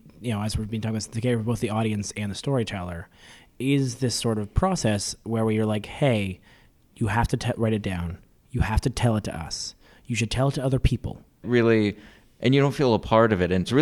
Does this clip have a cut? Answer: yes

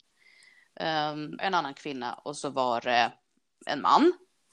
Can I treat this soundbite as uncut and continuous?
no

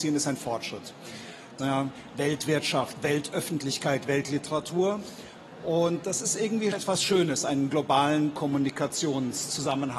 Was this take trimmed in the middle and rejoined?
yes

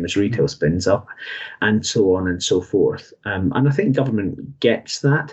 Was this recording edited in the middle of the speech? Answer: no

